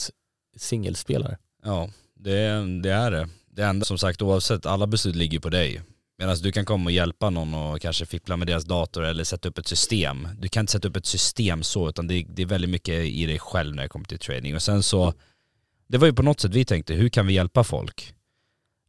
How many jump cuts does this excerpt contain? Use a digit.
1